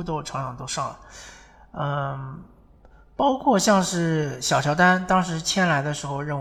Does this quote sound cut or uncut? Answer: uncut